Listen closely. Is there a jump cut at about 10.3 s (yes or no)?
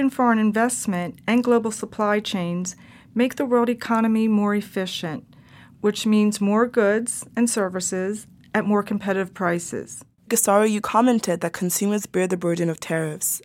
yes